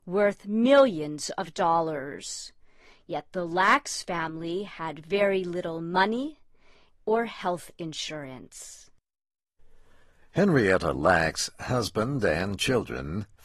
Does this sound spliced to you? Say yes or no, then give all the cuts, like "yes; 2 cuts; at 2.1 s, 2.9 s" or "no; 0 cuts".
yes; 1 cut; at 6.9 s